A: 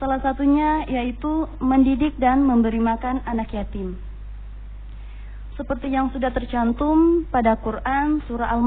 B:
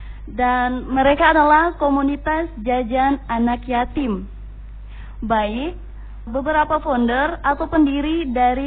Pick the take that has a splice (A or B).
B